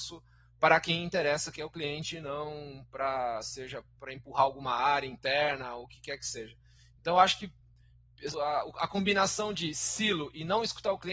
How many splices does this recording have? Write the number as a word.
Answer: one